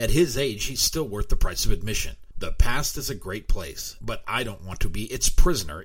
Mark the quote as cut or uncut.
cut